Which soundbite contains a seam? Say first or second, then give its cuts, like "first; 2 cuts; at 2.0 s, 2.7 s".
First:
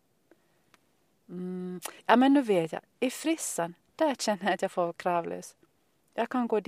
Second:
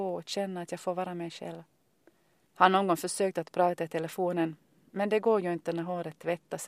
second; 1 cut; at 2.5 s